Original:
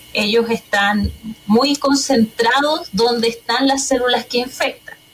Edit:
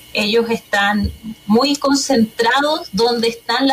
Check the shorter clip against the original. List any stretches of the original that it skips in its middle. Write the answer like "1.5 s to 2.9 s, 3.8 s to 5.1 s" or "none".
none